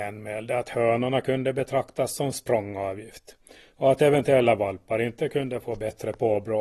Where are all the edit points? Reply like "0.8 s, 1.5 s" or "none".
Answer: none